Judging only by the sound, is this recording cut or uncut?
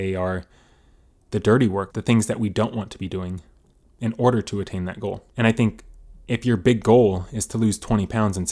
cut